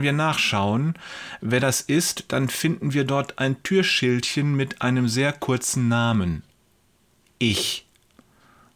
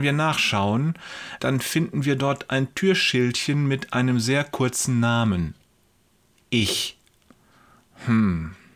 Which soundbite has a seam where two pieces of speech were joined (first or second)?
second